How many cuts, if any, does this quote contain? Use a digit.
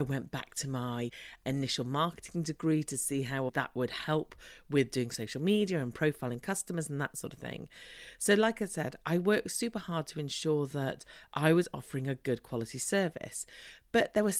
1